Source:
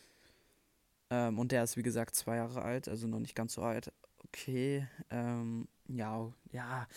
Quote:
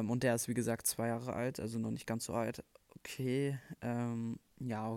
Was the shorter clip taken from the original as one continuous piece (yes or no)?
yes